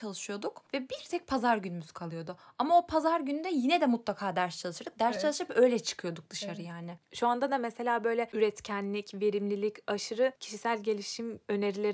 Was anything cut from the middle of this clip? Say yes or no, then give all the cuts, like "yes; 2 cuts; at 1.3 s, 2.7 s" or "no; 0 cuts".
no; 0 cuts